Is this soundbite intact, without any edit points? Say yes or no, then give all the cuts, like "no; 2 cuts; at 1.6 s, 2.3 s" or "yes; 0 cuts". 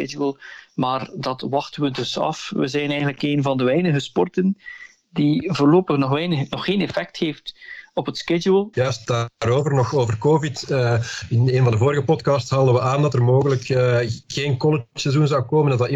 no; 1 cut; at 8.7 s